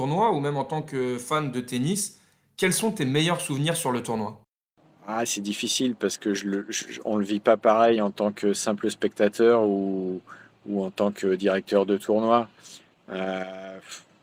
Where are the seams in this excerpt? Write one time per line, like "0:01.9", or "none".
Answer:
none